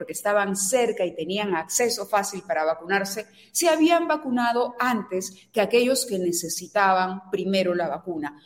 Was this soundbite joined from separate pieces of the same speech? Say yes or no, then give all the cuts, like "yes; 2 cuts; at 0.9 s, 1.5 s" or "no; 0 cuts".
no; 0 cuts